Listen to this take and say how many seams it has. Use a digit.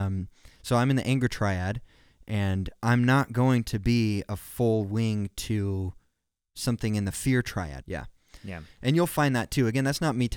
1